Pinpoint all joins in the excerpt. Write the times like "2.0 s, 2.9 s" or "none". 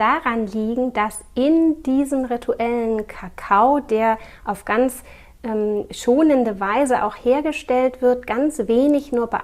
none